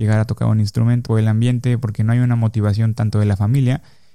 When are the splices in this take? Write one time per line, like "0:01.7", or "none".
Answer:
0:01.1